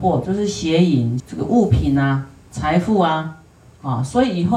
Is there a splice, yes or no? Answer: yes